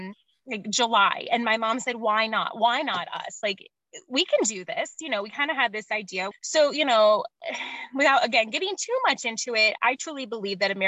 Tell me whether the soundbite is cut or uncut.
cut